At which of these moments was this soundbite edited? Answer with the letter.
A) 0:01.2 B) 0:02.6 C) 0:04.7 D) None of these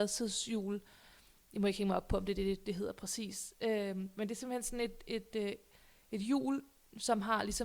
D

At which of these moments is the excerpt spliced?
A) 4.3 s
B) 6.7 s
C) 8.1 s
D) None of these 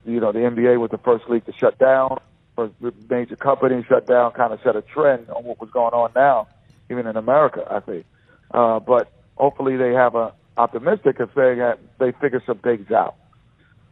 D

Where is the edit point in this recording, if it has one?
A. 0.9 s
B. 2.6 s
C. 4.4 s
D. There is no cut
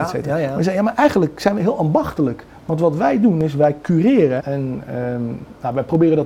C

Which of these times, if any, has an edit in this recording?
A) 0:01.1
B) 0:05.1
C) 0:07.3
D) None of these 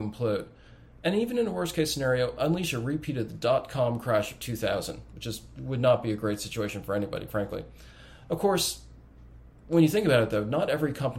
C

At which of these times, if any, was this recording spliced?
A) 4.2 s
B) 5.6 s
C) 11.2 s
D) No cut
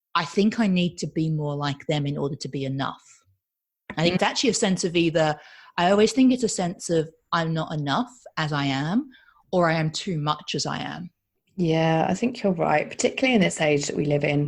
A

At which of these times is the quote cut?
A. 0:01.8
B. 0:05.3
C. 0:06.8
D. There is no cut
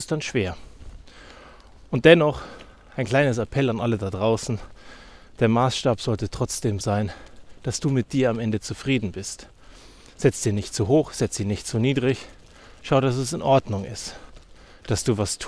C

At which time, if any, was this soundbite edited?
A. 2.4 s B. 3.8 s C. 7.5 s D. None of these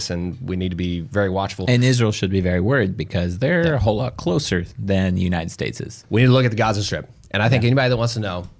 D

